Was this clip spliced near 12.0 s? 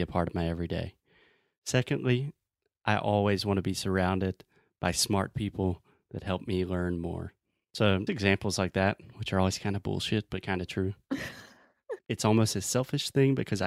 yes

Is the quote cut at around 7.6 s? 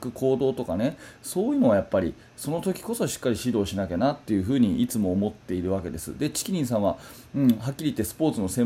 no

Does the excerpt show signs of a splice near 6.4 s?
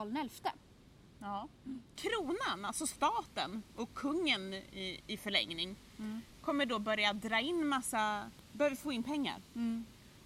no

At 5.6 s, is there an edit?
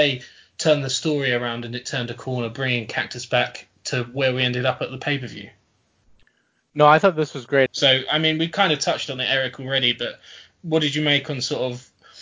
no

